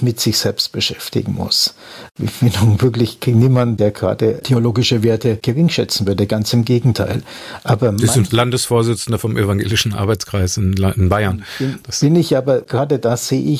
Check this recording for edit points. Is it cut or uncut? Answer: uncut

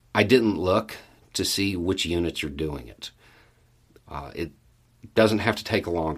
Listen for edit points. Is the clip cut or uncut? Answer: cut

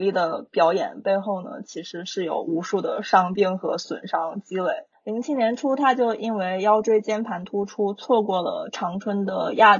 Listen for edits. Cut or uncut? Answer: uncut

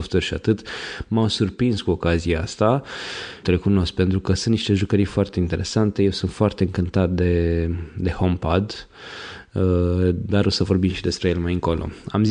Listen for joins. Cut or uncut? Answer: cut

